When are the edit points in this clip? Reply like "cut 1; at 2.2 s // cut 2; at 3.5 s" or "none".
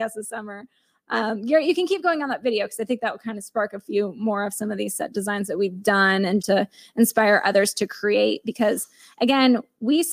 cut 1; at 6.4 s